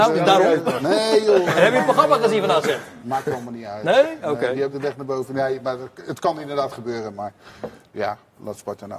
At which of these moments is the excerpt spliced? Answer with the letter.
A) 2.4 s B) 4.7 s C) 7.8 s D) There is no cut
B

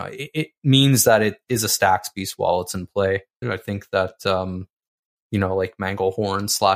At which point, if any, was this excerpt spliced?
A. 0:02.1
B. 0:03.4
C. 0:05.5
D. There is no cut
B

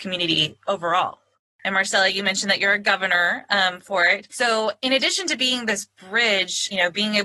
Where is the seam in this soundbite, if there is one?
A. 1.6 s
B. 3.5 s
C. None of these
A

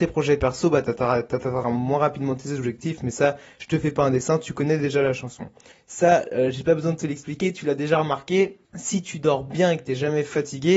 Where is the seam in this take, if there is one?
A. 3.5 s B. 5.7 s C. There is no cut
B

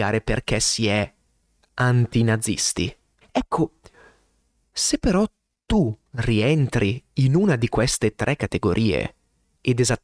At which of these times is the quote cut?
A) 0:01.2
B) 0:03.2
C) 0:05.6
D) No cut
B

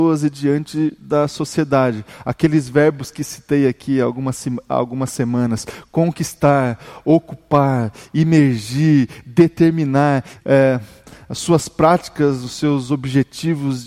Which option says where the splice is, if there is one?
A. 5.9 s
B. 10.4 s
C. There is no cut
B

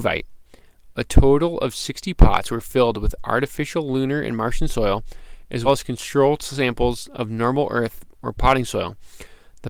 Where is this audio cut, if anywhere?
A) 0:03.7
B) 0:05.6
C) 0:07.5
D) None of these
B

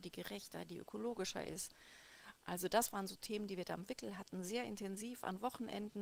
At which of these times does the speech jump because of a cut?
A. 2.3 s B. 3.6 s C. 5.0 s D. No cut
D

